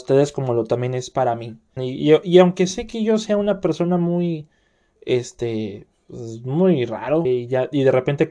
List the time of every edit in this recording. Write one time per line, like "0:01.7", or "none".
0:01.8
0:05.0
0:07.2